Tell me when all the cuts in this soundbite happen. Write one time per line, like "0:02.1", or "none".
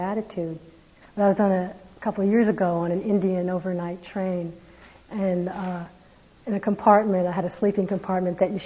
0:01.0